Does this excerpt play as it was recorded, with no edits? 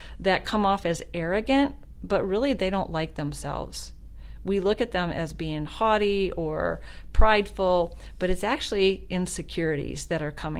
yes; 0 cuts

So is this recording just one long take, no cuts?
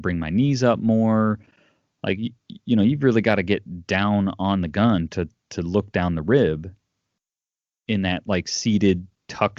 yes; 0 cuts

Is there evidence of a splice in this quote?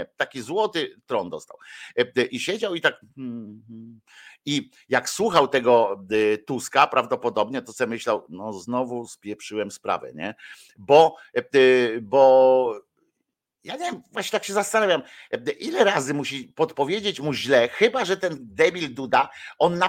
no; 0 cuts

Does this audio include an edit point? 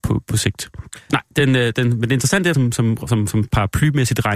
yes; 2 cuts; at 1.1 s, 2.5 s

